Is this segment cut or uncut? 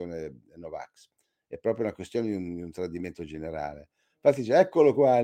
uncut